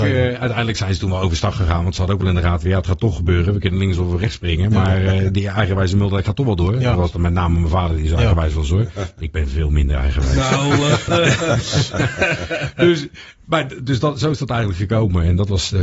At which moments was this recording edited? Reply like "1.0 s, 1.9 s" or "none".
none